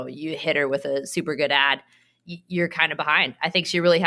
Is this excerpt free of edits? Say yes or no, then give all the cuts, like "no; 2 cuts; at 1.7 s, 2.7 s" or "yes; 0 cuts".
yes; 0 cuts